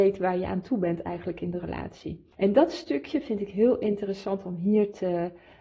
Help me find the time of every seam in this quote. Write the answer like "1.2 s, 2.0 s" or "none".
none